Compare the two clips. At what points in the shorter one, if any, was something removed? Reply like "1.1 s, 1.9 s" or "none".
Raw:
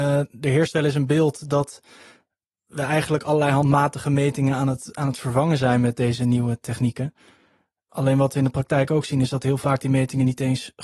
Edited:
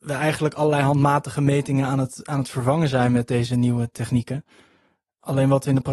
none